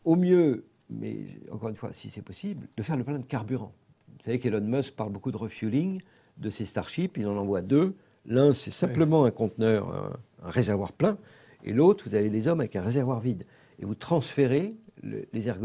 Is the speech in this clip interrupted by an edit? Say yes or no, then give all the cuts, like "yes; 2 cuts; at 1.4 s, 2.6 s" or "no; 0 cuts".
no; 0 cuts